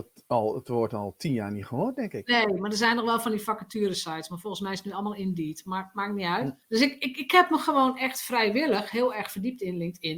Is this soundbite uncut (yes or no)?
no